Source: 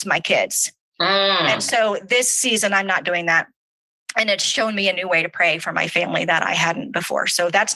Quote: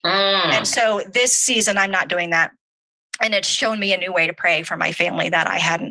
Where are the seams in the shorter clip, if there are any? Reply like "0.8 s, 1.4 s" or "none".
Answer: none